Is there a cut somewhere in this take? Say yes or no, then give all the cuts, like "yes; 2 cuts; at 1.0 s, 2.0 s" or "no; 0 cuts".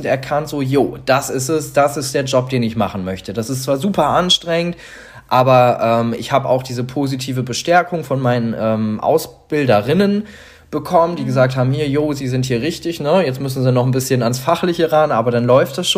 no; 0 cuts